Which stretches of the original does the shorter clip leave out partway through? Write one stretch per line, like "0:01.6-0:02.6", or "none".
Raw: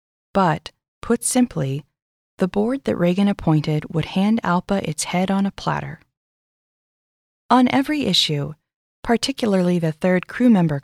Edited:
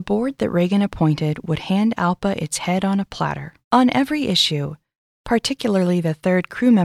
0:06.1-0:07.4